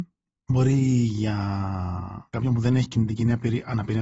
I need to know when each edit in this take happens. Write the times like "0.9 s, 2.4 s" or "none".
none